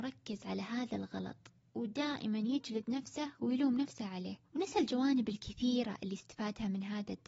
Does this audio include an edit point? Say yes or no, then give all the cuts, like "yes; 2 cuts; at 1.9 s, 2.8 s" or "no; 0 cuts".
yes; 1 cut; at 4.4 s